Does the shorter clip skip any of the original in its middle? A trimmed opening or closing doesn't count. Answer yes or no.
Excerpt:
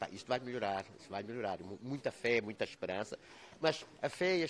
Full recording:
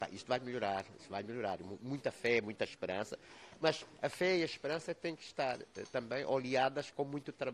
no